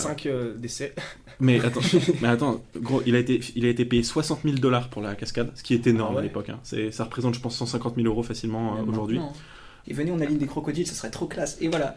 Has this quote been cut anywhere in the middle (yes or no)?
yes